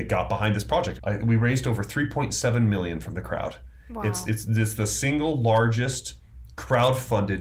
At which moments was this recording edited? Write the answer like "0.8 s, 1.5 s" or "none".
1.0 s